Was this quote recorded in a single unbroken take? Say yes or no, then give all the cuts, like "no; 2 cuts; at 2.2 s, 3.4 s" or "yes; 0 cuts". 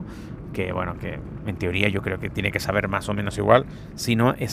yes; 0 cuts